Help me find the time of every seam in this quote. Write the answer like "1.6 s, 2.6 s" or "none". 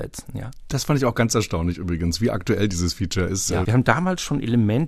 3.6 s